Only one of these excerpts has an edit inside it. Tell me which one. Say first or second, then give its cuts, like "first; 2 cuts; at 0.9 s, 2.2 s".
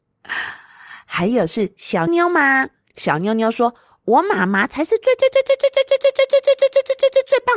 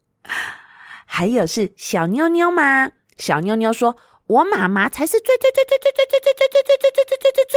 first; 1 cut; at 2.1 s